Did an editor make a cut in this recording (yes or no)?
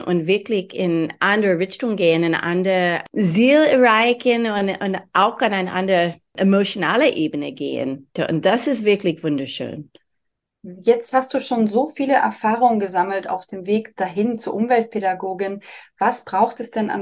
no